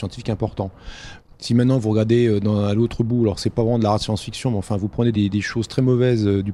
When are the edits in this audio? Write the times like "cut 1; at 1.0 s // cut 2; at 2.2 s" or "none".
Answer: cut 1; at 5.1 s